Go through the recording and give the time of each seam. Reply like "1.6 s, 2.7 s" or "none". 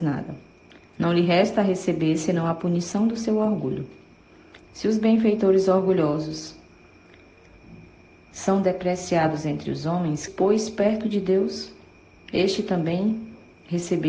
4.6 s, 10.3 s

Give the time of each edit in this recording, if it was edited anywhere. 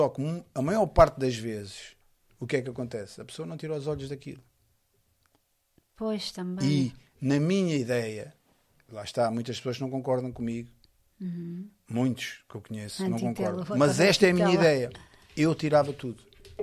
none

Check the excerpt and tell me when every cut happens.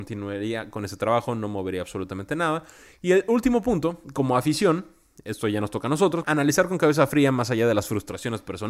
6.2 s

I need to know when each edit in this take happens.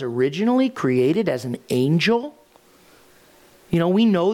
none

